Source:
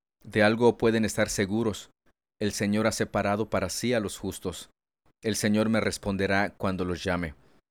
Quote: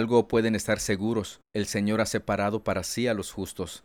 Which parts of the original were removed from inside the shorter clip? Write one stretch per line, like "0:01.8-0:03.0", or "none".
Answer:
0:02.0-0:02.3

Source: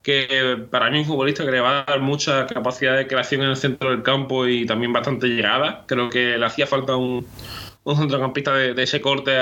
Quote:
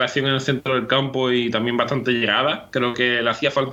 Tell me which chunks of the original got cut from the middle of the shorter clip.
none

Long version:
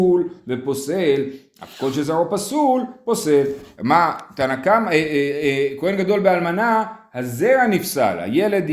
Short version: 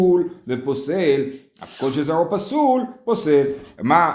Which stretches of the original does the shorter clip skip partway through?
none

